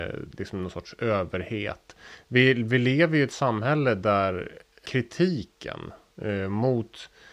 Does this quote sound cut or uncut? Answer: uncut